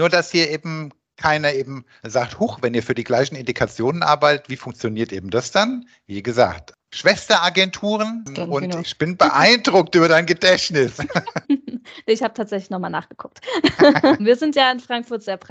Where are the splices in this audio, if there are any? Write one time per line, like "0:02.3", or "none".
0:08.8
0:11.4
0:14.2